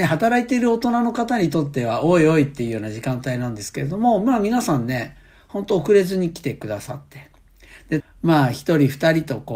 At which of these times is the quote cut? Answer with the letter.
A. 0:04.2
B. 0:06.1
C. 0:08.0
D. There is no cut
C